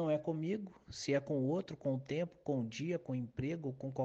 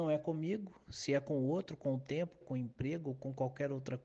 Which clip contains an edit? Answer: second; 1 cut; at 2.4 s

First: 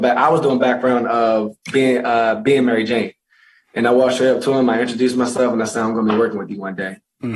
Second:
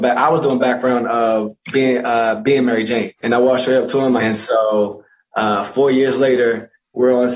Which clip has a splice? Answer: second; 2 cuts; at 3.2 s, 4.2 s

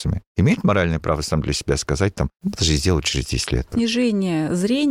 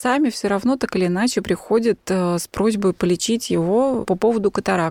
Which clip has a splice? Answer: first; 1 cut; at 3.7 s

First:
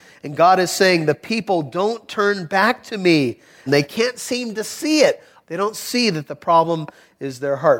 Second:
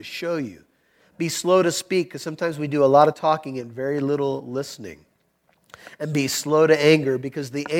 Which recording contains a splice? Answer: first; 2 cuts; at 3.7 s, 5.4 s

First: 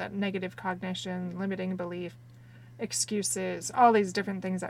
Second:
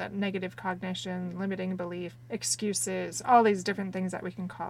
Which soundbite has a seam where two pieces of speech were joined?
second; 1 cut; at 2.2 s

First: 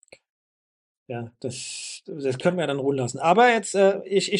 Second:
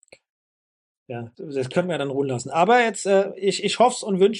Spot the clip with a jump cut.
second; 1 cut; at 1.3 s

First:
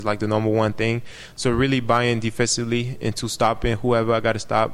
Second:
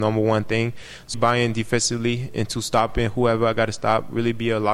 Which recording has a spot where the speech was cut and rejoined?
second; 1 cut; at 1.1 s

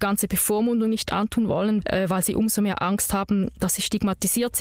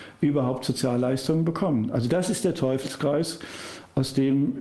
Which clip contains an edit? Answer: first; 1 cut; at 1.8 s

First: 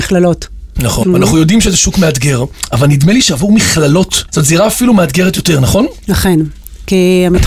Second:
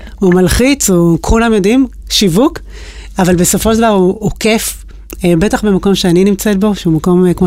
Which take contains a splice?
first; 2 cuts; at 1.0 s, 4.3 s

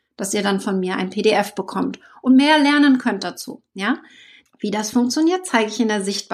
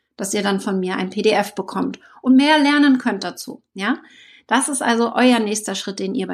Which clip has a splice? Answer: first; 1 cut; at 4.5 s

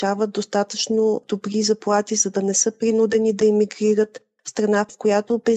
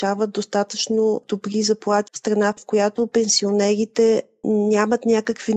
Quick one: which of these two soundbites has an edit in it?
second; 1 cut; at 2.1 s

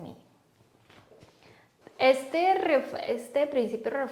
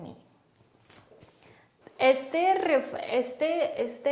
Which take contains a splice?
first; 1 cut; at 3.1 s

